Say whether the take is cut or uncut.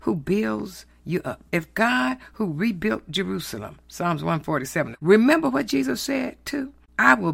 cut